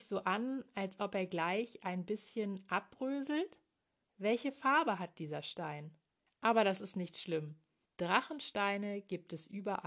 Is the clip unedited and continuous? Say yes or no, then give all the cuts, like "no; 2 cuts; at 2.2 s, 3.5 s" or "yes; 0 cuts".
no; 3 cuts; at 4.0 s, 6.3 s, 7.9 s